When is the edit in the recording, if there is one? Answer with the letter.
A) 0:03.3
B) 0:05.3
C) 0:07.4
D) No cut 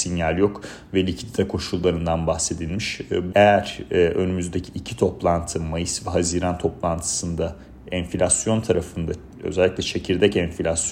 A